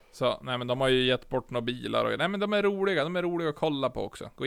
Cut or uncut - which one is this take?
uncut